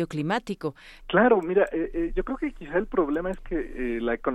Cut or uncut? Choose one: cut